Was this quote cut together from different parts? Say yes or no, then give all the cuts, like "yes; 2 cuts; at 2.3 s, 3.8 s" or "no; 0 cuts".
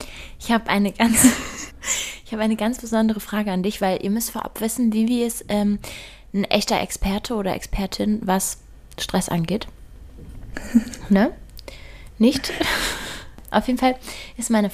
yes; 1 cut; at 1.7 s